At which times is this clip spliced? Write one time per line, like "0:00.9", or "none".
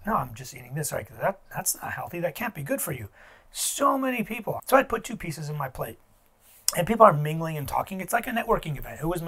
0:04.6